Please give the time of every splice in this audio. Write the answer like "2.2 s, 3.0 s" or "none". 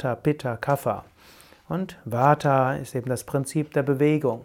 none